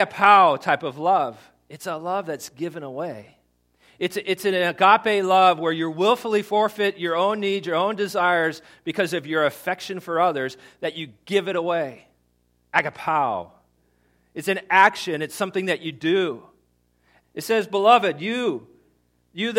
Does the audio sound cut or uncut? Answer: cut